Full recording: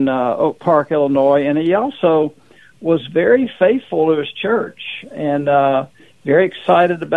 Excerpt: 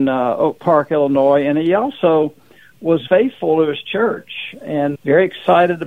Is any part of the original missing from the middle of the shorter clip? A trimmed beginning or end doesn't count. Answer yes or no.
yes